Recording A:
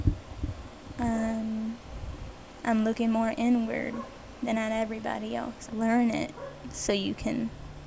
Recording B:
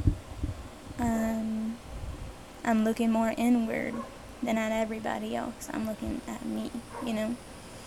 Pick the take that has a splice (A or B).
A